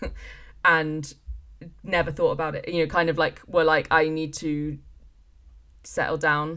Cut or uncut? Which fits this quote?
uncut